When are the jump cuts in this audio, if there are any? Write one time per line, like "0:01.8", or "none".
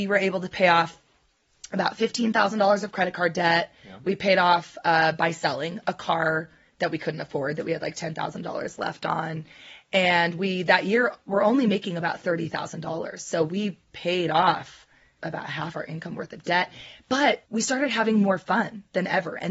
0:15.2
0:17.5